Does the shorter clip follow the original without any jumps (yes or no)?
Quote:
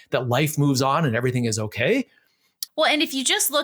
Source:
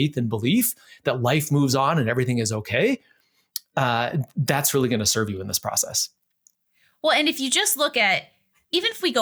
no